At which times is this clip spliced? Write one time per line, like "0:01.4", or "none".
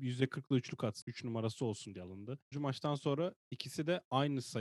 0:01.0
0:02.5